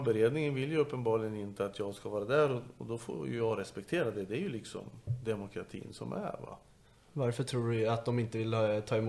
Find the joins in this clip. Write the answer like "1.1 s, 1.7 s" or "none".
none